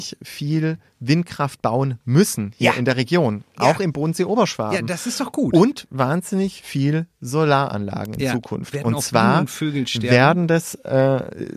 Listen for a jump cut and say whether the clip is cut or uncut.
uncut